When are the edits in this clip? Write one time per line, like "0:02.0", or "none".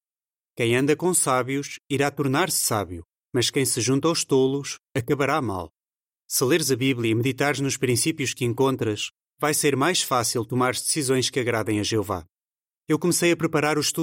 0:06.2
0:12.8